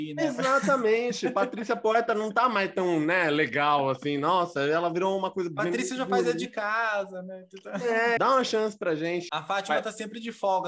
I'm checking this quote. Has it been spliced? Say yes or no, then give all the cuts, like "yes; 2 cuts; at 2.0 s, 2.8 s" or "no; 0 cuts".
yes; 2 cuts; at 8.2 s, 9.3 s